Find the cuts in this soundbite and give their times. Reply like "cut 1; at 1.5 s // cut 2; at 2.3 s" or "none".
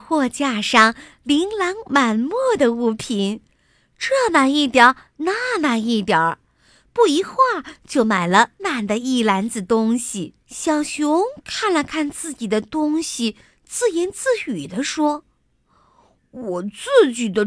cut 1; at 8.6 s // cut 2; at 10.4 s